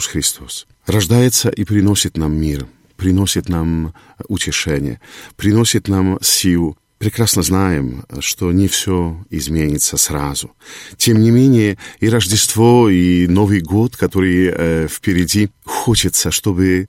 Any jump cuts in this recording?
no; 0 cuts

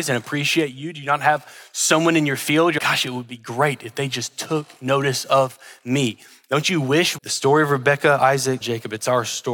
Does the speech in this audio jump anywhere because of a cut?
yes; 3 cuts; at 2.8 s, 7.2 s, 8.6 s

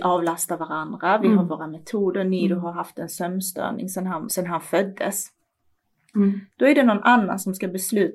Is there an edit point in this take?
yes; 2 cuts; at 4.3 s, 6.1 s

